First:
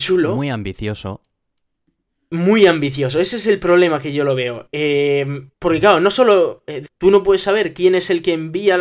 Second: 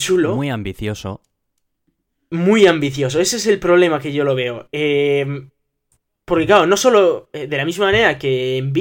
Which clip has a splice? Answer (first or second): first